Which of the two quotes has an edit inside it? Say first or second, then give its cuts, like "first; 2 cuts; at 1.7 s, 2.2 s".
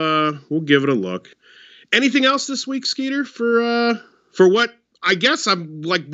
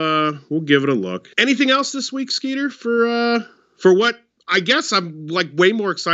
second; 1 cut; at 1.3 s